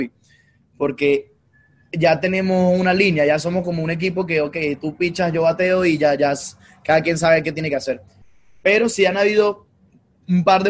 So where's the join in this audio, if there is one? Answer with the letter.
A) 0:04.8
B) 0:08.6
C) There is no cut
C